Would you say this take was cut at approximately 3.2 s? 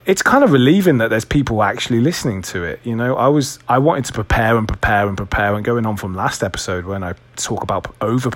no; 0 cuts

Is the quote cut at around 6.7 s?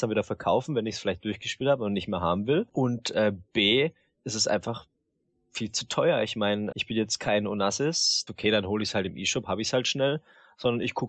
yes; 3 cuts; at 2.7 s, 6.7 s, 8.3 s

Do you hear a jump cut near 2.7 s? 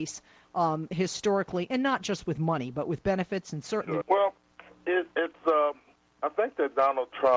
no; 1 cut; at 4.0 s

